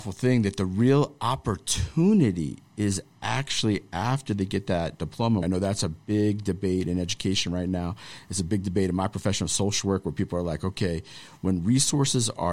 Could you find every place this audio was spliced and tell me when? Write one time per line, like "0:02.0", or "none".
0:05.4